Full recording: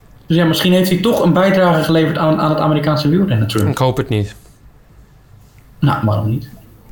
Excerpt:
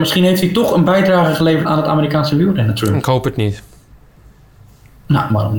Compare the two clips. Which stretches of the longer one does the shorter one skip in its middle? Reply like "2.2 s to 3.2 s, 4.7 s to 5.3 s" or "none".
2.1 s to 2.4 s